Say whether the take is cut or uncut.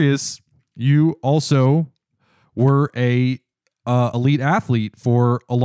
uncut